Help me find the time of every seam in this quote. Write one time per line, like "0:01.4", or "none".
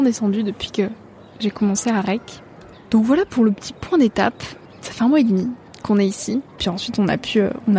0:06.6